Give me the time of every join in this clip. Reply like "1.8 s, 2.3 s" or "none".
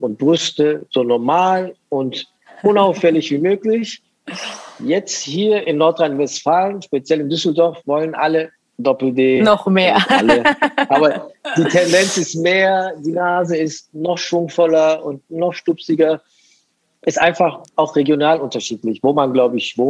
none